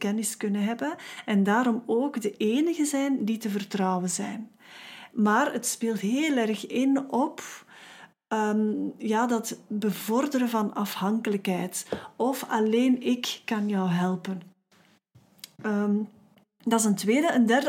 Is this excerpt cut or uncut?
cut